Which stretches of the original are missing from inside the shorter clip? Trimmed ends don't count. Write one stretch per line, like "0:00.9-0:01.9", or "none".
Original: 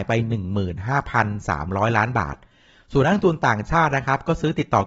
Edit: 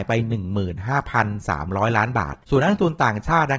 0:02.4-0:02.8